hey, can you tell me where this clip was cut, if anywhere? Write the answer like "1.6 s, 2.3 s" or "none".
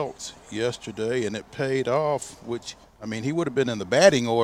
none